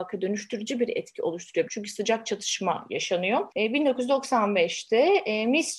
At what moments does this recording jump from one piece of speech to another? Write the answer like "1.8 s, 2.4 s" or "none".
1.7 s